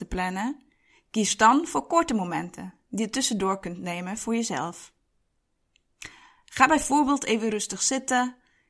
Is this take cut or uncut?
cut